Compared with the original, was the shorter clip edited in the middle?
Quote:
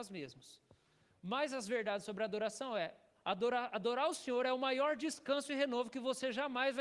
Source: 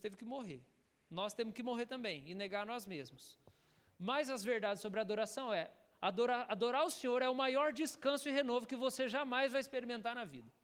no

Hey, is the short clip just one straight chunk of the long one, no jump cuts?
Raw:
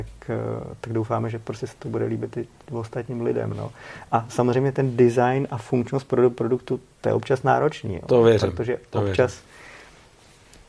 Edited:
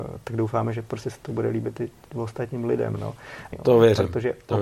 no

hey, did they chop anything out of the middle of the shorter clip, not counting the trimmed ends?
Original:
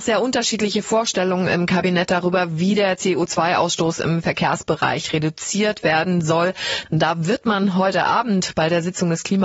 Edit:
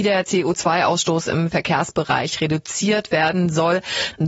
no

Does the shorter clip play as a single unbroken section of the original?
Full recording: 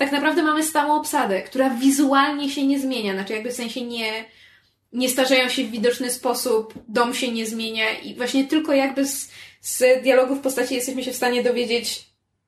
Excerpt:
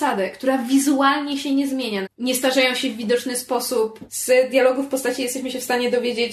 no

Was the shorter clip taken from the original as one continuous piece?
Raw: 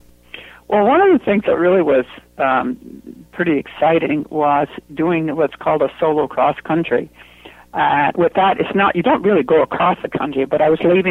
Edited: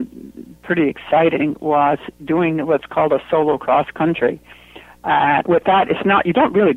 yes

